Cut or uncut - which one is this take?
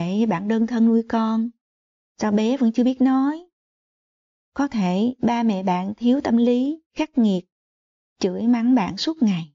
cut